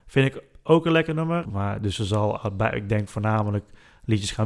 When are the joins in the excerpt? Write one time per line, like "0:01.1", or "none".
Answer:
0:01.4